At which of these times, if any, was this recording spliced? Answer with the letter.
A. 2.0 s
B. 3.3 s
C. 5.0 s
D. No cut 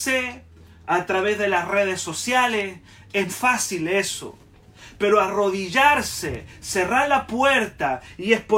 B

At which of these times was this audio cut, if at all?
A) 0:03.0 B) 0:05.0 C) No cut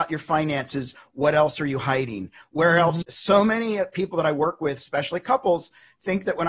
A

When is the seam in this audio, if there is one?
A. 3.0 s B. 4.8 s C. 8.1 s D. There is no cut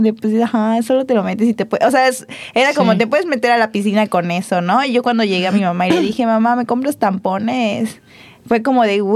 D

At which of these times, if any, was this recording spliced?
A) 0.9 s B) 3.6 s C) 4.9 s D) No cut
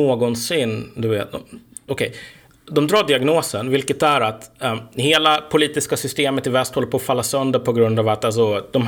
D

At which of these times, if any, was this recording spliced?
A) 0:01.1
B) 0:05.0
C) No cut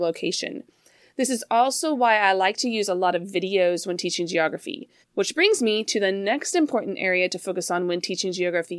B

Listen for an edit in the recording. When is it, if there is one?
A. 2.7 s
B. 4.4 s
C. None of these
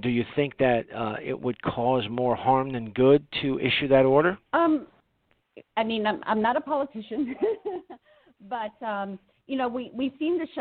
B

